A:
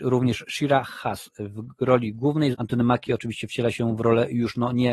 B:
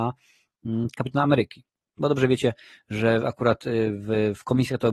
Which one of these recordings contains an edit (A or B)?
A